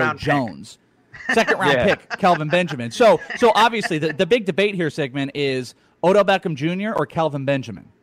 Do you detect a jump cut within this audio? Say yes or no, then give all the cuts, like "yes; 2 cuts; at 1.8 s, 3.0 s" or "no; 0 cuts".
no; 0 cuts